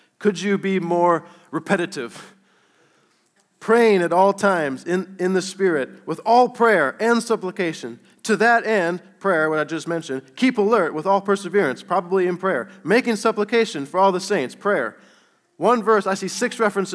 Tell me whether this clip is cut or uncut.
uncut